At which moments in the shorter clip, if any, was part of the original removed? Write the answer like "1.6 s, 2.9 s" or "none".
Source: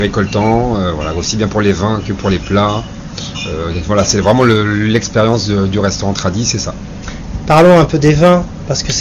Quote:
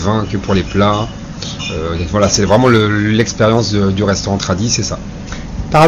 none